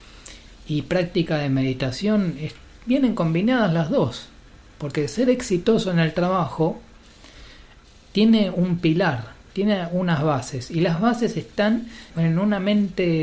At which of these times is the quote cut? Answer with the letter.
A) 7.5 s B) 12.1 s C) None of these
B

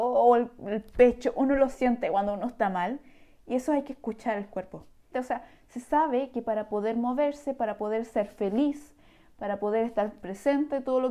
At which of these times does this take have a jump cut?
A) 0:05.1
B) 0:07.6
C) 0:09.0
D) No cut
A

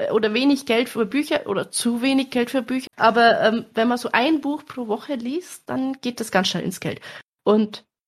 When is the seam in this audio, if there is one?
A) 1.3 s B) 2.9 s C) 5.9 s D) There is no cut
B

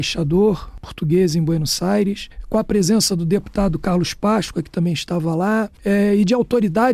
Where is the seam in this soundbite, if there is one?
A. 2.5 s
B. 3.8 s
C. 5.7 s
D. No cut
D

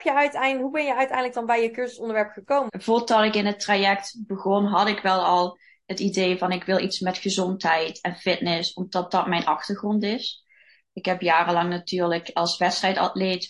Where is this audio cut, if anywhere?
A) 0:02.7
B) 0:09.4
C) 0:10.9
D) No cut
A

